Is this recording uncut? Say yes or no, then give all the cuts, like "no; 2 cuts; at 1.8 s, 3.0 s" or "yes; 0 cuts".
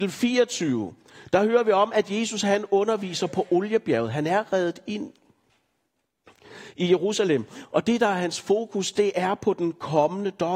yes; 0 cuts